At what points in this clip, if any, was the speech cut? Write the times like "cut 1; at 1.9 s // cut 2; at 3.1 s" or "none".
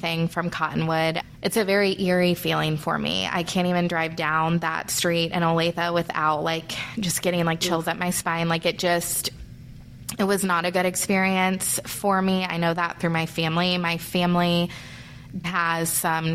cut 1; at 15.4 s

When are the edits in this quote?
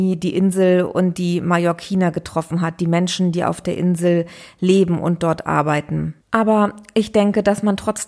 cut 1; at 6.2 s

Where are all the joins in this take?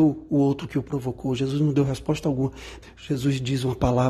cut 1; at 2.8 s

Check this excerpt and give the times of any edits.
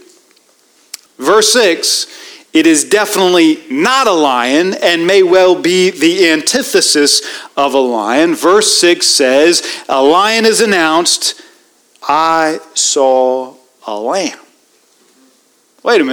cut 1; at 1.1 s

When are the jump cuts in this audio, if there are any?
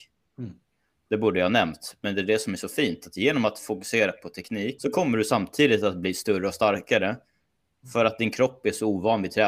cut 1; at 4.8 s

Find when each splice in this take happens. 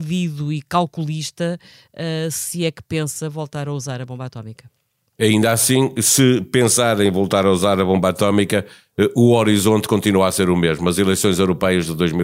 none

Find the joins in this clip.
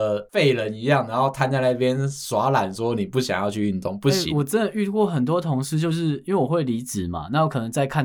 none

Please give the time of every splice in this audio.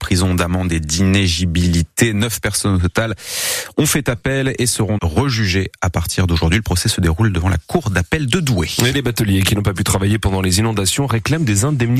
cut 1; at 5.0 s

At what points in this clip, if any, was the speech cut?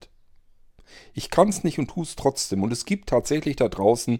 none

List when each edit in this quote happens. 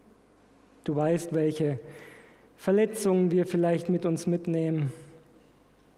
none

